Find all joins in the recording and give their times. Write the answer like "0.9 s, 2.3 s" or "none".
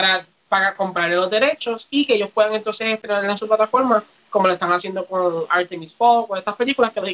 none